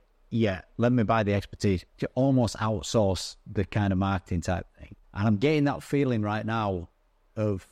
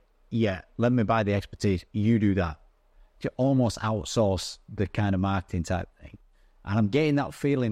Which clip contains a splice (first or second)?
first